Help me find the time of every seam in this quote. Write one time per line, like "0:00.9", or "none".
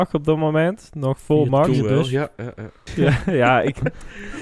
0:02.9